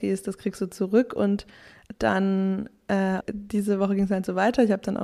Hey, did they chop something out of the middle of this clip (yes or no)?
yes